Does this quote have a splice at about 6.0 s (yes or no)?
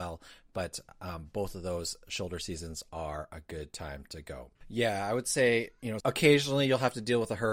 yes